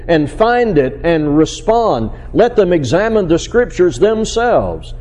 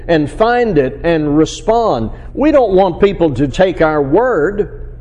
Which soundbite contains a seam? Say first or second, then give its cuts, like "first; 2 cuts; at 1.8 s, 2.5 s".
second; 2 cuts; at 2.3 s, 3.5 s